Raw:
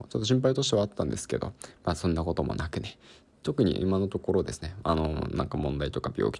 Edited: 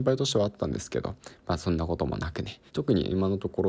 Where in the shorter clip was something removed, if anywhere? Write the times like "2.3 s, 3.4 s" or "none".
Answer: 2.7 s